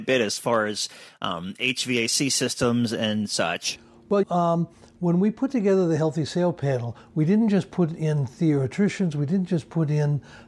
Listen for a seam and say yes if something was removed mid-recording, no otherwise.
yes